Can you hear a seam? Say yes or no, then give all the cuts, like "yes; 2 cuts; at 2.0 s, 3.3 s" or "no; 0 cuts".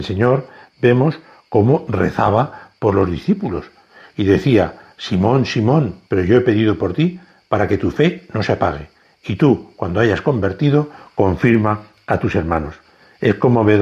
yes; 1 cut; at 6.1 s